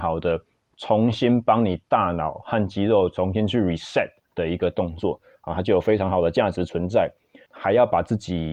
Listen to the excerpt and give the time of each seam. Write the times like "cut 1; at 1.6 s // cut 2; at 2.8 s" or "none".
cut 1; at 7.5 s

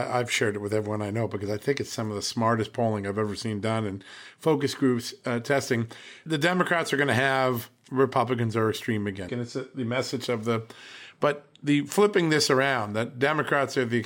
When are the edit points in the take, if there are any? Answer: cut 1; at 9.3 s

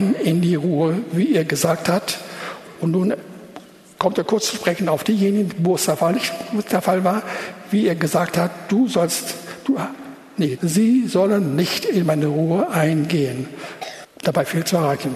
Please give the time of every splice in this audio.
cut 1; at 10.6 s // cut 2; at 14.0 s

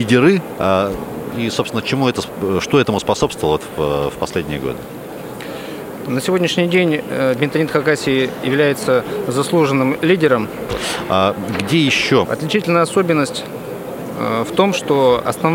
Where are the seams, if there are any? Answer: cut 1; at 10.7 s // cut 2; at 12.2 s

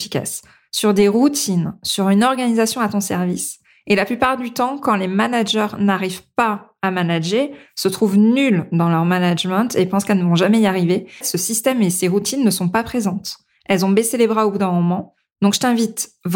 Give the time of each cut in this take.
cut 1; at 11.2 s

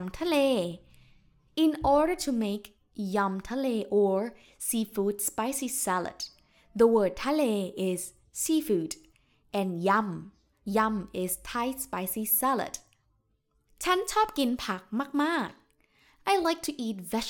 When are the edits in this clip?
none

